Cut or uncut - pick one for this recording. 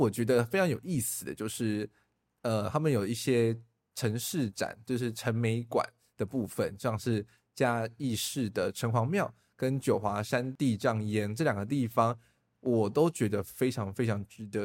uncut